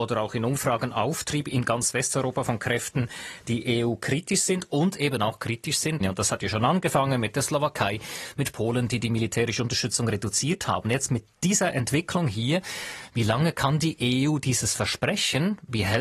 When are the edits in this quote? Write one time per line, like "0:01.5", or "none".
0:06.0